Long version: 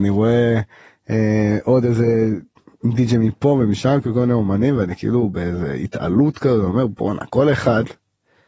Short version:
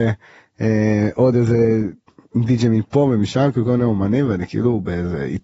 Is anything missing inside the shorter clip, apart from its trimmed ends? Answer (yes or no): no